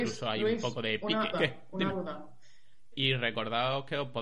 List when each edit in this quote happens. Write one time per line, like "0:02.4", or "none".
0:01.3
0:02.9